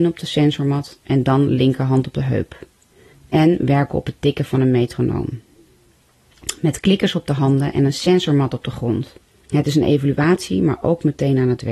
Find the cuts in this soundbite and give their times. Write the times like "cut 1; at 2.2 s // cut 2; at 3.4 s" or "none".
cut 1; at 3.1 s // cut 2; at 9.4 s

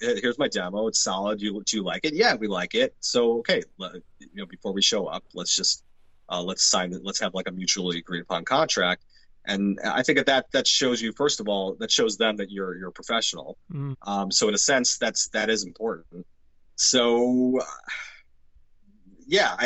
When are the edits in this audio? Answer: cut 1; at 13.9 s

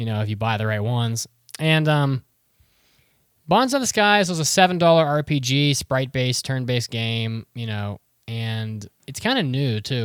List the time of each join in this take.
none

